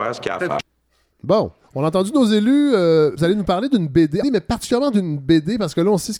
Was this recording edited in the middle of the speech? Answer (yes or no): yes